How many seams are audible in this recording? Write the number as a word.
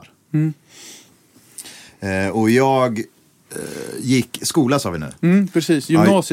zero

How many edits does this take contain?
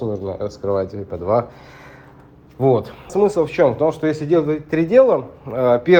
one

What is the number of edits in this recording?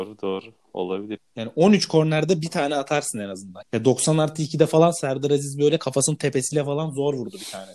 two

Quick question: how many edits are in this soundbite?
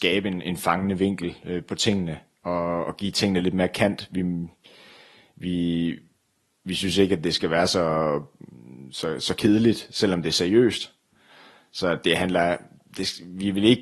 zero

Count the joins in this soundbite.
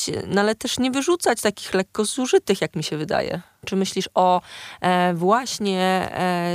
one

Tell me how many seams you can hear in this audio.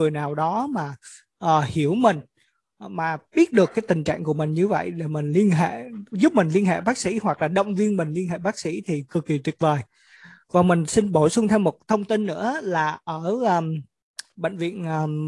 one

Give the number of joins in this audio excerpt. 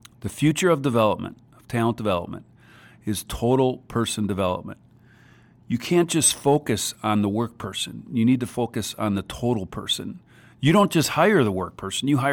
zero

